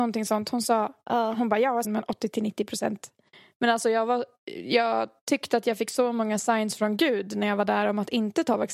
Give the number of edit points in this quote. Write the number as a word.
one